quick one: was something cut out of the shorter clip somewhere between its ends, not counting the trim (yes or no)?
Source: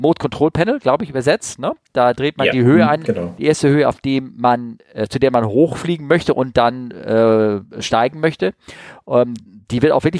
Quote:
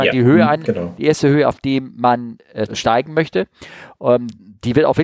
yes